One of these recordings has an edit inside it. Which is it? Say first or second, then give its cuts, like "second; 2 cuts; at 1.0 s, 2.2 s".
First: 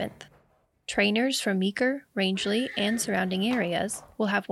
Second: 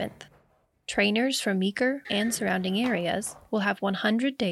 second; 1 cut; at 2.0 s